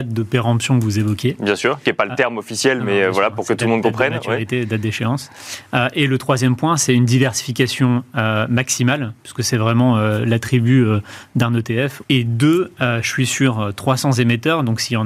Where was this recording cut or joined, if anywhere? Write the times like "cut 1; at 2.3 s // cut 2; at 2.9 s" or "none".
cut 1; at 12.0 s